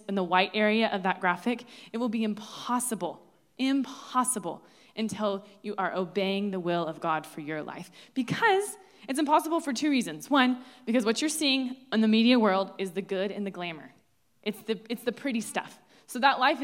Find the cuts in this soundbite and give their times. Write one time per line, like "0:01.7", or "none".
none

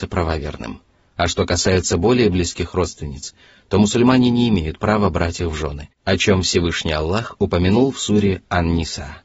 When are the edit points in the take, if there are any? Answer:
none

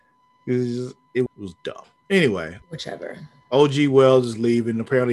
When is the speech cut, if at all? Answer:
0:01.3
0:02.6

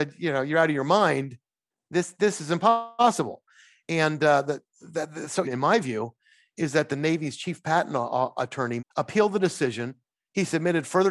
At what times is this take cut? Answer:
0:05.4
0:08.8

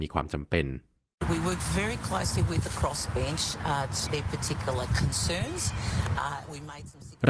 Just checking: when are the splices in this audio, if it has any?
0:04.1

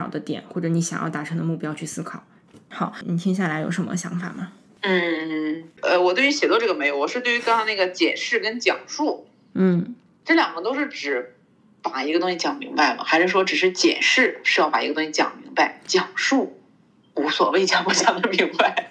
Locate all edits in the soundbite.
none

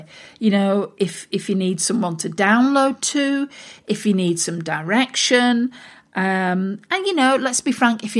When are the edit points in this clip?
none

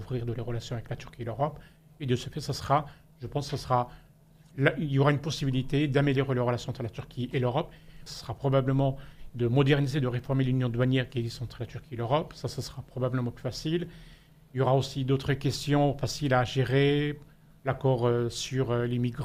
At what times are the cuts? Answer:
0:08.1
0:09.3

